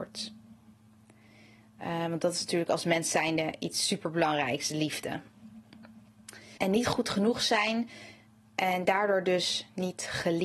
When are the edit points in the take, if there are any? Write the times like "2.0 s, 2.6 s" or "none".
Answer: 6.6 s